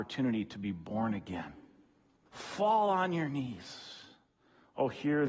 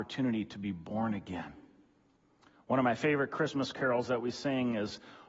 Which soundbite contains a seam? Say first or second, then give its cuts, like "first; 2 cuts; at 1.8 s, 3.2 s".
first; 1 cut; at 2.3 s